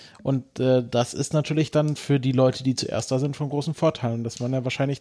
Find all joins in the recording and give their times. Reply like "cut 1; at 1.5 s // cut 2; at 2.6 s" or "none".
none